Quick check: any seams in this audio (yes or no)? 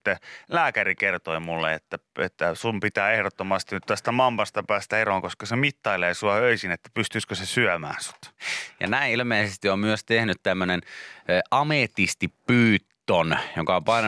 no